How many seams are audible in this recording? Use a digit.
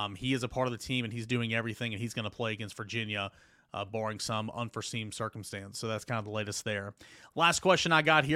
0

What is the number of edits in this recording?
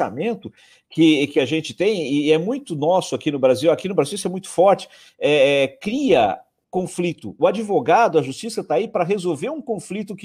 0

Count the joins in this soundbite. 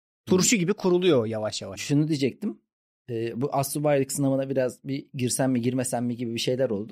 1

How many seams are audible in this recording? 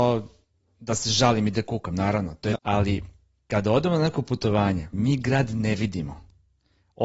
2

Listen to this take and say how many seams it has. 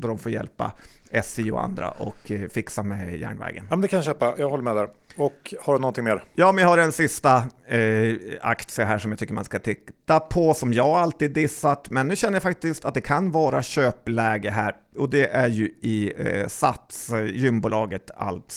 0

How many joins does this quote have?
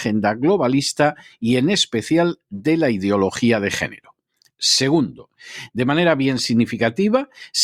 0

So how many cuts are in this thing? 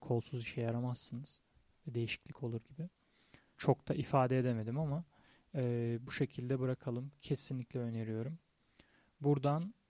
1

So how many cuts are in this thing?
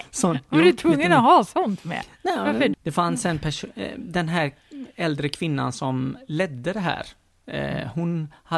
1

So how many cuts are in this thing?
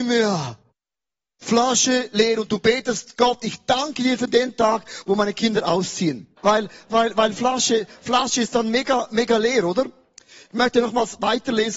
1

